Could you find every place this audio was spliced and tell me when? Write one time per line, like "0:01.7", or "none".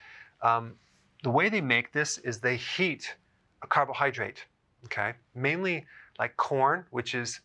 none